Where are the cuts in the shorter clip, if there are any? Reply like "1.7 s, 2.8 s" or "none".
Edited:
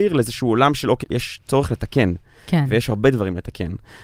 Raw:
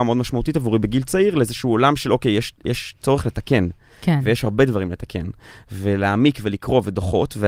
1.0 s